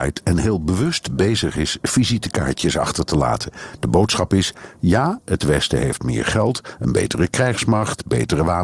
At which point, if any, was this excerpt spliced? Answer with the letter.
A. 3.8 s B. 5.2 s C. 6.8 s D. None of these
D